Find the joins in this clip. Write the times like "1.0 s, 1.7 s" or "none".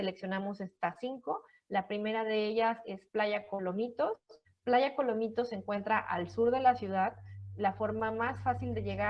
none